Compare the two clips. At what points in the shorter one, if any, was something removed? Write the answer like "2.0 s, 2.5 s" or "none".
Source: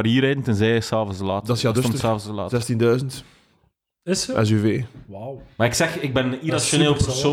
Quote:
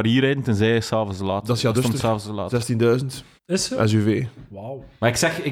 3.4 s